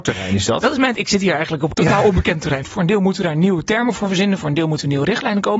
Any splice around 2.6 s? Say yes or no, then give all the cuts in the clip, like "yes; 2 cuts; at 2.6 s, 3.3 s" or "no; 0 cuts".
yes; 1 cut; at 2.6 s